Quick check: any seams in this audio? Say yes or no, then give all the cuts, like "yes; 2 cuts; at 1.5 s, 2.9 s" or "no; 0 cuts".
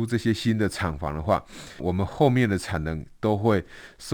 yes; 1 cut; at 1.8 s